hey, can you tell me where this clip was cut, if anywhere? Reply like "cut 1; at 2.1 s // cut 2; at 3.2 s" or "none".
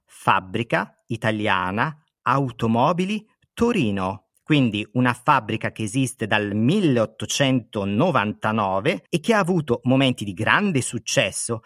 cut 1; at 9.1 s

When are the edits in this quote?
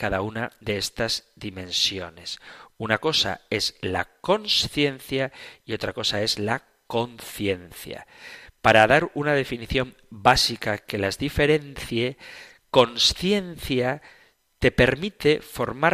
none

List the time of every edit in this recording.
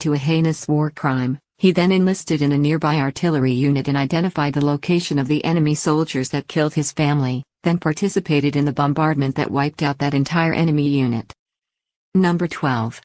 none

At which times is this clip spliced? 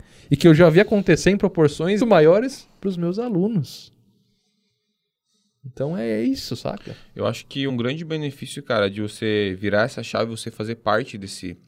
cut 1; at 2.0 s // cut 2; at 7.7 s

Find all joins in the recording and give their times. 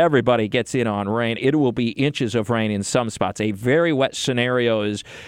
cut 1; at 1.4 s

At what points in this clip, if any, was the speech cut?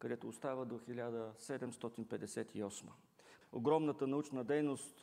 cut 1; at 3.4 s

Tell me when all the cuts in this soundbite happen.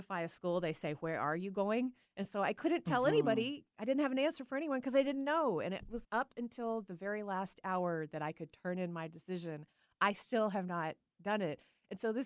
cut 1; at 6.0 s

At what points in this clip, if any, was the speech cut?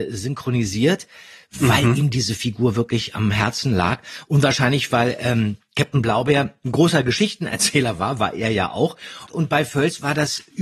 cut 1; at 9.3 s

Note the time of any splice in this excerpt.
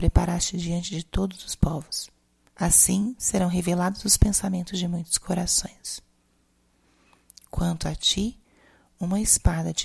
cut 1; at 2.5 s

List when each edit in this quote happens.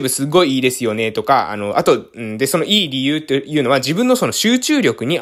none

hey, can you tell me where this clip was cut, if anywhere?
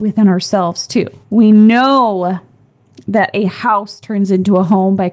cut 1; at 1.2 s

